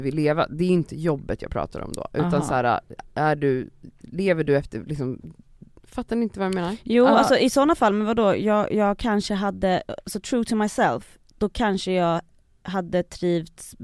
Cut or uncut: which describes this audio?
uncut